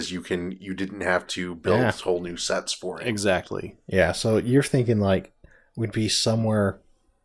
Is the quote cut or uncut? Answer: uncut